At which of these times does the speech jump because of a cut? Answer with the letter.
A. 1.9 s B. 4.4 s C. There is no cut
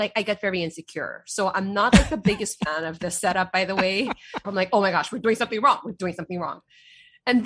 B